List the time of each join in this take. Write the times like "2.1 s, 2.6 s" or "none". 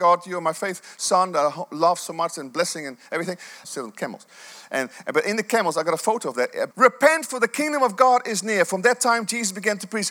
3.6 s, 6.7 s